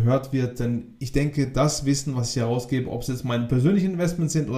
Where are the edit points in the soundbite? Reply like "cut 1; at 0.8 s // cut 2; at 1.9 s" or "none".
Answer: none